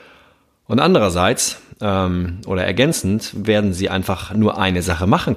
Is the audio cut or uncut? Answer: uncut